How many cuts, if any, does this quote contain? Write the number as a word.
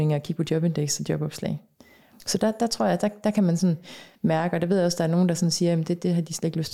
one